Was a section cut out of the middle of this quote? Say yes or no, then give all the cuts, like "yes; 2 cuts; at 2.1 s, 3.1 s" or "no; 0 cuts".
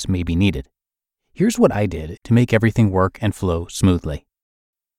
yes; 1 cut; at 2.2 s